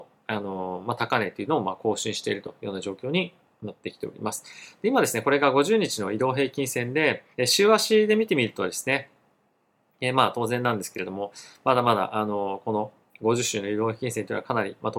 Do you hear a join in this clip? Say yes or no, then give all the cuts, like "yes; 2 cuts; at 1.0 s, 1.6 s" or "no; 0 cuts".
yes; 1 cut; at 7.3 s